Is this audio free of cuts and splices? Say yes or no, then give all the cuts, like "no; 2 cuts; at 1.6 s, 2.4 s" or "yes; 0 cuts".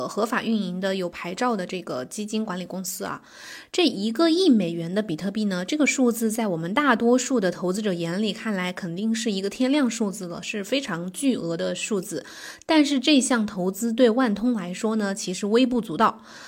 yes; 0 cuts